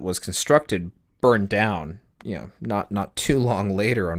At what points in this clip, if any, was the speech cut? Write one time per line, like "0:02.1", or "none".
0:02.2